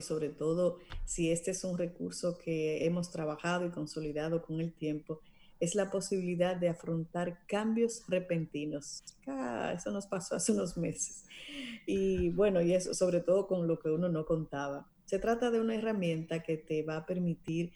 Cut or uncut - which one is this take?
uncut